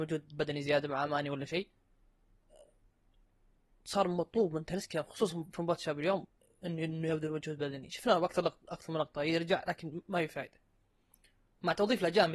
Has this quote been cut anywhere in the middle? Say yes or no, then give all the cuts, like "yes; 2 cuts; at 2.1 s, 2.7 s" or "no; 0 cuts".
no; 0 cuts